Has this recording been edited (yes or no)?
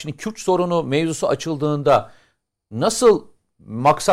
no